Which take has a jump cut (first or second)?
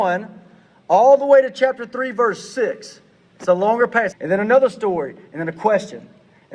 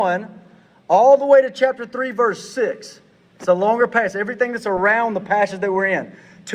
first